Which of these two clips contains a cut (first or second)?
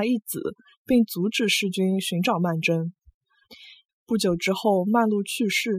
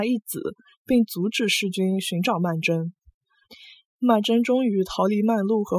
first